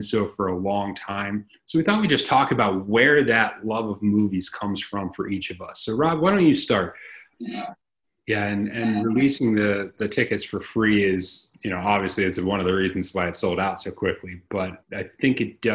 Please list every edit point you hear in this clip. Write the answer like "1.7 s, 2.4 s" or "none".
7.3 s, 14.8 s